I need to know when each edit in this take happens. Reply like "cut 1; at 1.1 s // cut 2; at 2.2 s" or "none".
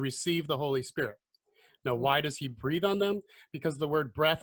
none